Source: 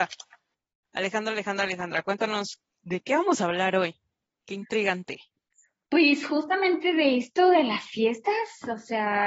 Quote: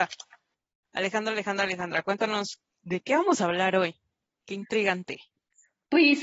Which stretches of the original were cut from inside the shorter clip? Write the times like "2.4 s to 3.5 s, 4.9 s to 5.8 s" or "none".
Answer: none